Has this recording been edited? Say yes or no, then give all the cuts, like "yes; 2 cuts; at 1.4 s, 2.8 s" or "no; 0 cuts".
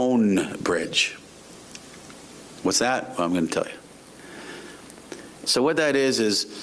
yes; 1 cut; at 5.4 s